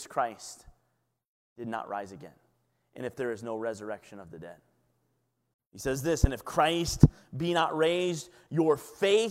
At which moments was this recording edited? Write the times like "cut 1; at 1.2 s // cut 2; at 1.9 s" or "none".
cut 1; at 5.5 s